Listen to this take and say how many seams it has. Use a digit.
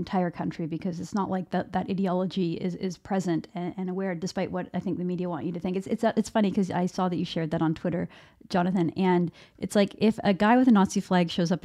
0